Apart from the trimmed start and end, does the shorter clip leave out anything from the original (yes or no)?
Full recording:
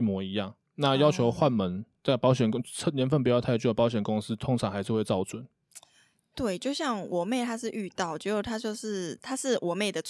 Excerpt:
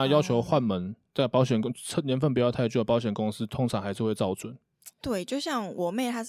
yes